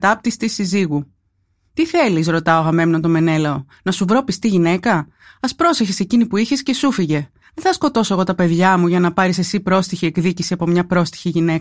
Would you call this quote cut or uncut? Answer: uncut